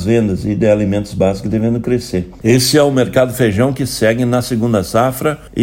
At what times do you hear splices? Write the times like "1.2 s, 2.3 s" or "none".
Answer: 2.4 s